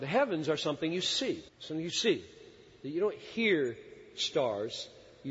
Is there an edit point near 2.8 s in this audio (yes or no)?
no